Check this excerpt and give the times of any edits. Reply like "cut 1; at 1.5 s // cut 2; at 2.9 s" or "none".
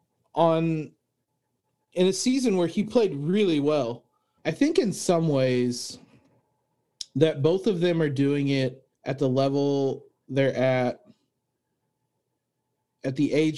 cut 1; at 4.4 s // cut 2; at 8.9 s